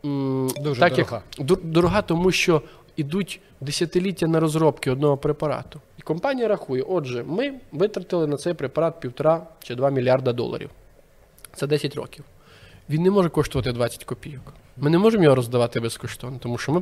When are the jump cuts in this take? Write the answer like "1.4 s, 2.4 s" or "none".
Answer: 5.9 s